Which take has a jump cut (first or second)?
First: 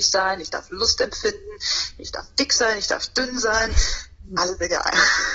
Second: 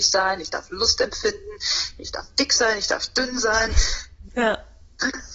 second